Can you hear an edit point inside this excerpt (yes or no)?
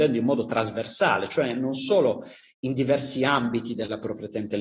no